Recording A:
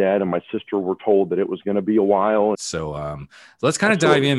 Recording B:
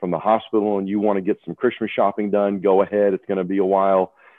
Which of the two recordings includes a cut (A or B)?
A